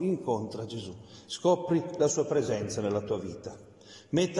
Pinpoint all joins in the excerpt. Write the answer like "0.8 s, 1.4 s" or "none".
none